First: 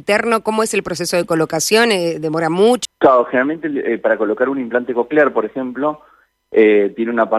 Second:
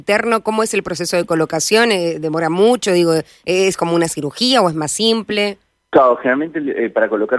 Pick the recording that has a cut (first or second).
first